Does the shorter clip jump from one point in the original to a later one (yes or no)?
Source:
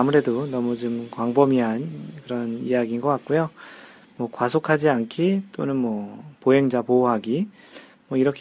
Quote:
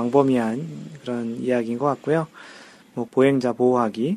yes